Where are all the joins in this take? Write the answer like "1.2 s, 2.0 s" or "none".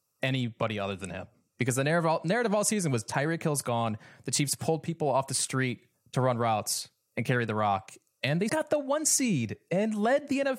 8.5 s